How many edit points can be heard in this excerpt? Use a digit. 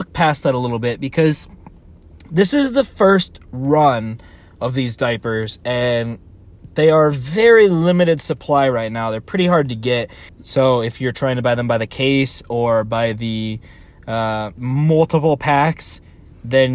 2